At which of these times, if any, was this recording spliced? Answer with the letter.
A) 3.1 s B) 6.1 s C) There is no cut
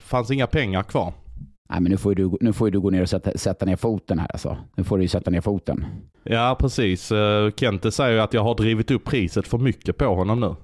B